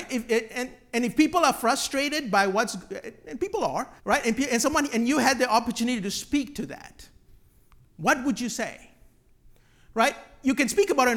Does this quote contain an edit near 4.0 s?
yes; 1 cut; at 4.0 s

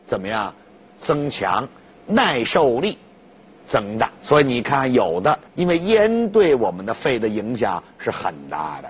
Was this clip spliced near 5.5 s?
yes; 2 cuts; at 4.2 s, 5.5 s

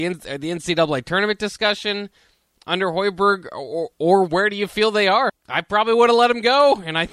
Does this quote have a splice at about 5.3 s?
yes; 1 cut; at 5.3 s

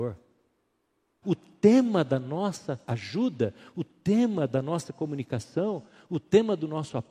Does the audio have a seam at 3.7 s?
no; 1 cut; at 1.2 s

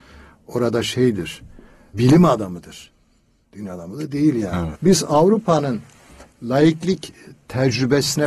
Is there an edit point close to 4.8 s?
yes; 1 cut; at 4.8 s

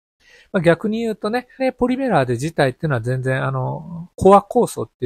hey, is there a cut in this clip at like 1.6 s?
yes; 1 cut; at 1.6 s

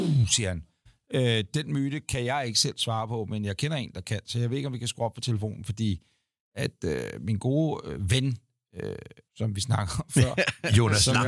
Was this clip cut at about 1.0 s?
no; 1 cut; at 9.3 s

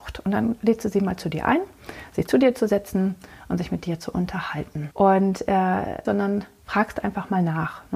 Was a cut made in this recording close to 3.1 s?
no; 2 cuts; at 4.9 s, 6.0 s

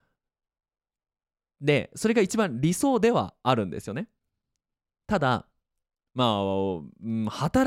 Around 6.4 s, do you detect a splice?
no; 0 cuts

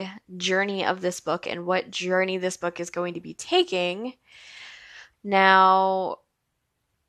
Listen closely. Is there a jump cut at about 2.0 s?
no; 1 cut; at 5.1 s

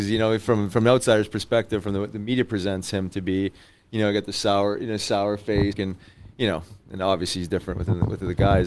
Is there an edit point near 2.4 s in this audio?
no; 1 cut; at 5.7 s

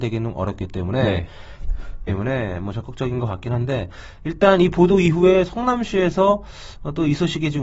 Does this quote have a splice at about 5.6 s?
no; 1 cut; at 2.1 s

